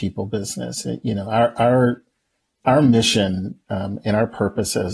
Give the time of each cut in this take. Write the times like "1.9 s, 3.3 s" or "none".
none